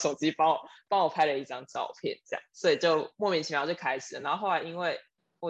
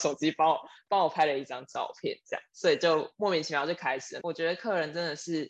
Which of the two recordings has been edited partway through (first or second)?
second